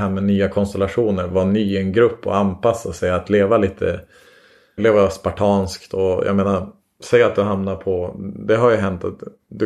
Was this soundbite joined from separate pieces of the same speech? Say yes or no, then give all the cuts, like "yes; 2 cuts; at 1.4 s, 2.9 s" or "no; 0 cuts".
yes; 1 cut; at 4.8 s